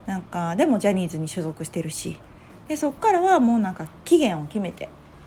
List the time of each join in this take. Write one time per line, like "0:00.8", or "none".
0:02.7